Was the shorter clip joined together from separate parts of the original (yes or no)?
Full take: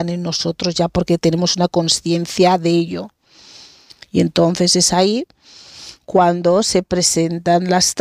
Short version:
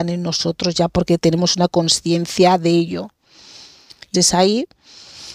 yes